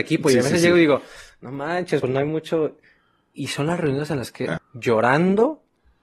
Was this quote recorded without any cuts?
no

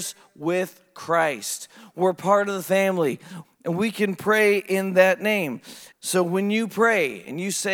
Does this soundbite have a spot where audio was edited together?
yes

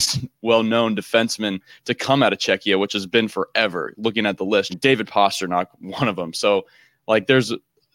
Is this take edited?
yes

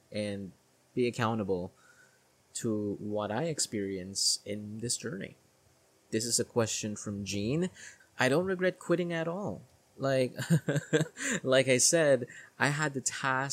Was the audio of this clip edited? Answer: yes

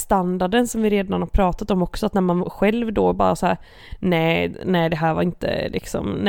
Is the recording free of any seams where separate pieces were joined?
yes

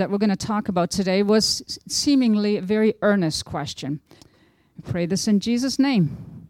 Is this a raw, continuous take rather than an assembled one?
no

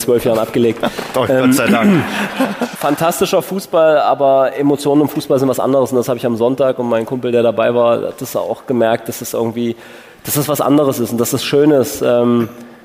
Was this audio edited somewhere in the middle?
no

